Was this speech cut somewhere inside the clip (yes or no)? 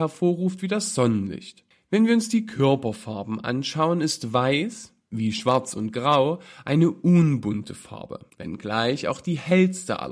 no